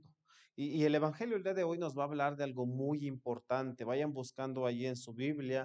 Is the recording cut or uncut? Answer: uncut